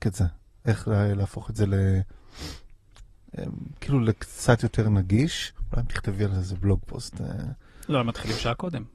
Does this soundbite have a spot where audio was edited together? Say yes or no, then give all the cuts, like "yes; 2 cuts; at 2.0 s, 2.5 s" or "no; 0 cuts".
yes; 1 cut; at 7.9 s